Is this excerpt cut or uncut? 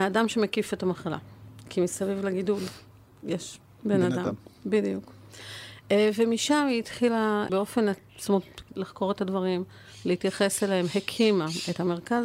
cut